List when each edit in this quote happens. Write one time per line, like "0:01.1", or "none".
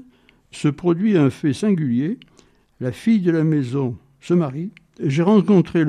0:05.0

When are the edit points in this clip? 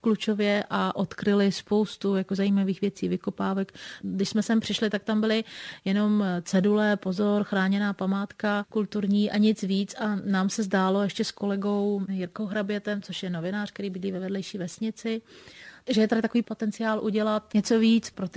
0:04.0

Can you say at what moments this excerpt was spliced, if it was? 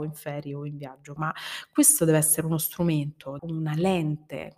0:01.2
0:03.4

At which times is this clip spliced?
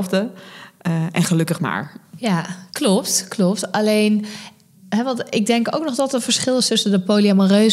0:02.7

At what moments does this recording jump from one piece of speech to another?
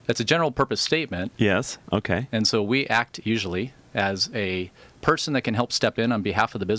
0:01.8

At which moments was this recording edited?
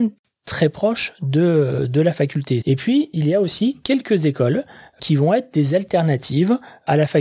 0:02.6

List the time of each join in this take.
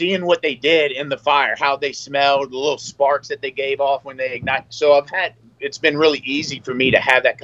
0:04.7

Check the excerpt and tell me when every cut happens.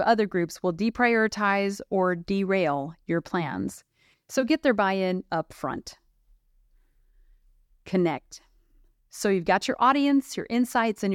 none

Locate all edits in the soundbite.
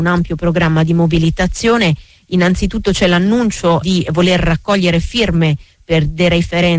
0:03.8

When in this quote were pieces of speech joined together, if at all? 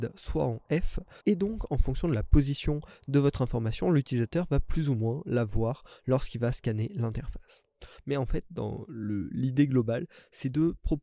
0:01.2
0:08.0

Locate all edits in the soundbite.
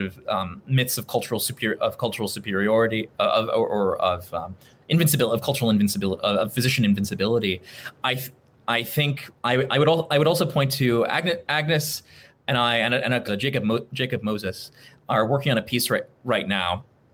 0:09.4
0:13.3

